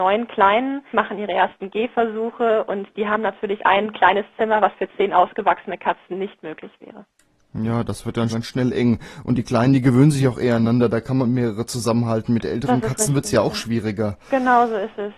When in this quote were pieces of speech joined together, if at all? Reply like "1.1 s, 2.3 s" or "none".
0.9 s, 8.3 s